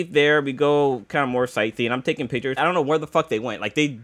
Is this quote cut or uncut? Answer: cut